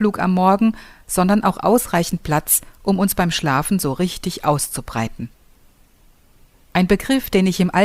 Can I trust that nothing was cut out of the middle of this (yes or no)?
no